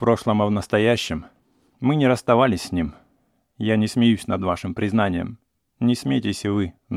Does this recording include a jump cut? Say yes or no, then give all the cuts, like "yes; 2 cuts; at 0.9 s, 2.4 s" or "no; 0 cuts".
no; 0 cuts